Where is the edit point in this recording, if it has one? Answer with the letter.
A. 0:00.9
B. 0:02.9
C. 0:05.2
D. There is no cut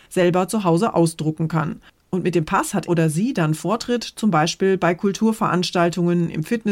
B